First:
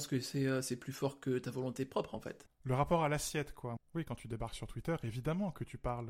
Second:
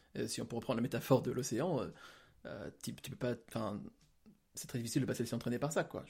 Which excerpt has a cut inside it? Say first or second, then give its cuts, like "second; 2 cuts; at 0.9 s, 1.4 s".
first; 2 cuts; at 2.5 s, 3.8 s